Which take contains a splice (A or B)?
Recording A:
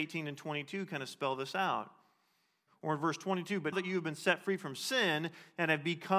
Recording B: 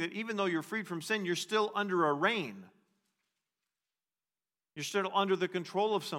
A